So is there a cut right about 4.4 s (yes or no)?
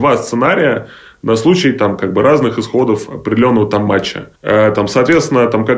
yes